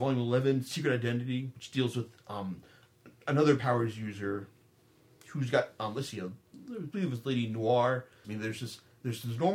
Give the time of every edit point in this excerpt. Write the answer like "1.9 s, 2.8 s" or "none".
8.2 s

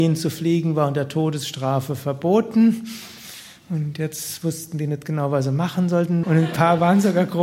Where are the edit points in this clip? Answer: 6.2 s

